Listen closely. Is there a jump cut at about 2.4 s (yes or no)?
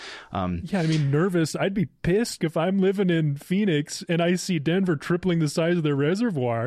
yes